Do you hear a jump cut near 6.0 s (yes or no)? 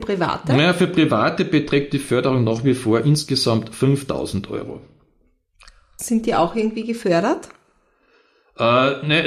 yes